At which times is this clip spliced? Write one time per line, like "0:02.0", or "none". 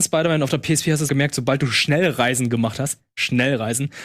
0:01.1